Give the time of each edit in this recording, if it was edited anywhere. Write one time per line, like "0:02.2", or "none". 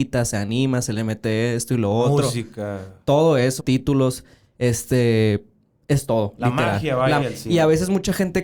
0:03.6
0:07.2